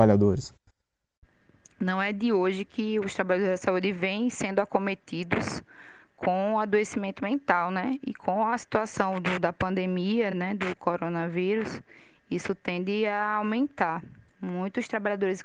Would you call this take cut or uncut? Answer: uncut